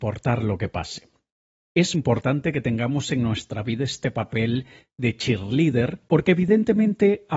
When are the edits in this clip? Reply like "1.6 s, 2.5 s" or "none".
1.9 s, 6.1 s